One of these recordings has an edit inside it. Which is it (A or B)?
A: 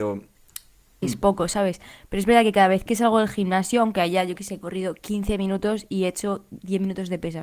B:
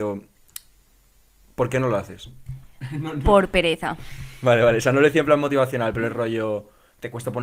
A